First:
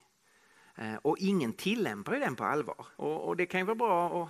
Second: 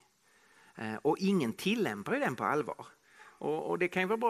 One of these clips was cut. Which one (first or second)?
first